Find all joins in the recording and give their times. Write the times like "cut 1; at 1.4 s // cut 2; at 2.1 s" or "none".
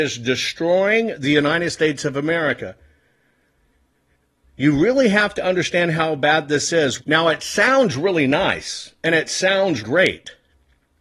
cut 1; at 7.0 s // cut 2; at 9.8 s